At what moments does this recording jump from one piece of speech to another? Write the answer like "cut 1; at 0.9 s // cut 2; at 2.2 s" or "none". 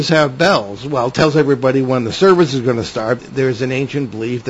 cut 1; at 3.2 s